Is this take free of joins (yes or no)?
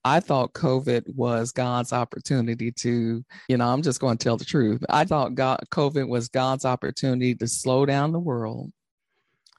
no